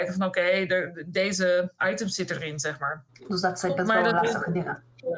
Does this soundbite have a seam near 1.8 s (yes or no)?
yes